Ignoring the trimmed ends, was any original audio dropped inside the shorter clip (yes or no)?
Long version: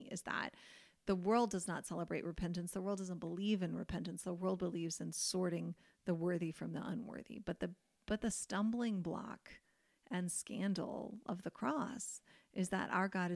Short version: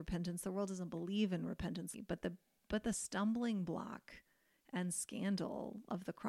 yes